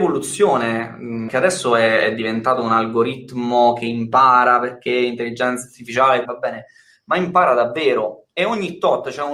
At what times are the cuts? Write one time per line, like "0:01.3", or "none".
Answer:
0:01.3
0:06.2